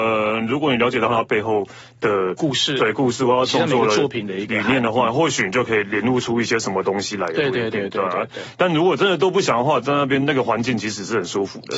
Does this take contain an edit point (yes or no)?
no